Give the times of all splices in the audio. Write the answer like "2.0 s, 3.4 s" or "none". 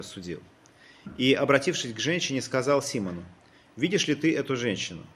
none